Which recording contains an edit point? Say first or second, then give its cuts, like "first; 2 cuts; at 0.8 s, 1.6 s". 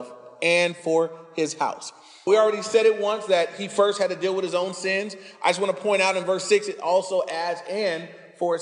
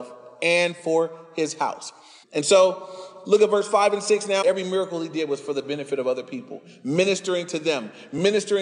second; 2 cuts; at 2.2 s, 4.4 s